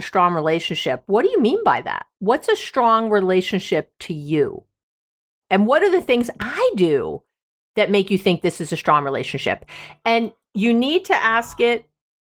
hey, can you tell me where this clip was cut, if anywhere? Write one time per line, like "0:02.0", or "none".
0:05.4